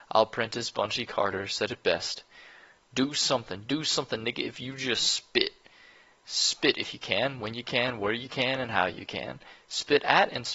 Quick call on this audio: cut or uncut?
uncut